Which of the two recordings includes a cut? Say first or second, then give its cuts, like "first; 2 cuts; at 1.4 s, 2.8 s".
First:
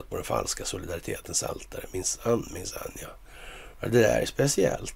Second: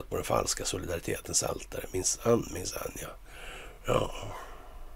first; 1 cut; at 3.7 s